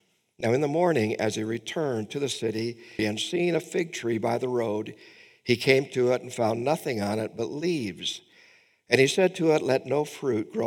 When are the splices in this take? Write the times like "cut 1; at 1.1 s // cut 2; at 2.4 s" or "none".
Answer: cut 1; at 3.0 s